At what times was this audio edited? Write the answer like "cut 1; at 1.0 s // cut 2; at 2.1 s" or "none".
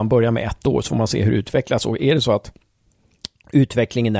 none